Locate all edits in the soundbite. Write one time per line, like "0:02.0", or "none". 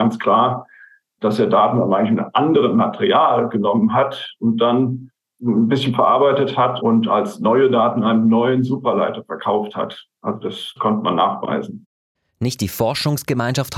none